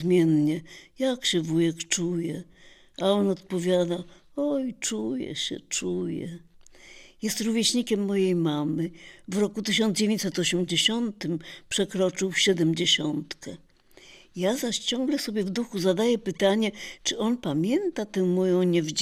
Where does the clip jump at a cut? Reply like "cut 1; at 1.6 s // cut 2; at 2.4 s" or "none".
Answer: none